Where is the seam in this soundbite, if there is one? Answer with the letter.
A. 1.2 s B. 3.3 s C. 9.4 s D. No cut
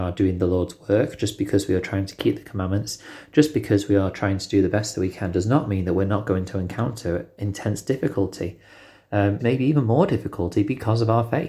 C